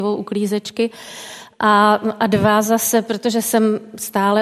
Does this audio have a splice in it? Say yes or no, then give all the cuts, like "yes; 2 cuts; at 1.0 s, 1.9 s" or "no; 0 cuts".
no; 0 cuts